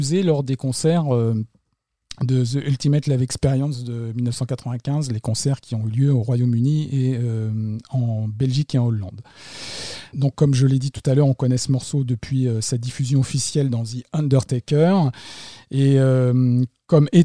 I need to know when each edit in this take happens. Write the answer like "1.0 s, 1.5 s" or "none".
10.1 s